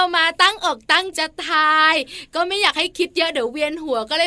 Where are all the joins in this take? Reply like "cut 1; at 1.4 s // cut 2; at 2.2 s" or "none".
cut 1; at 1.1 s